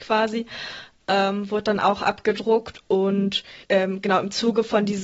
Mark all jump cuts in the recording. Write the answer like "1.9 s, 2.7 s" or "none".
3.6 s